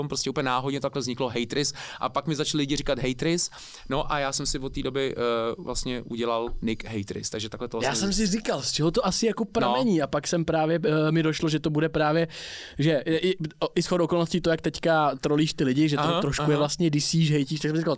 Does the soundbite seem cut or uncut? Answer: uncut